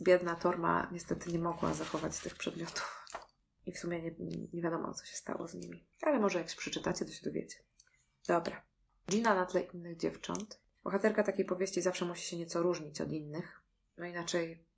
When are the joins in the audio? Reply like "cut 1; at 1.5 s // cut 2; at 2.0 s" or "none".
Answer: cut 1; at 5.9 s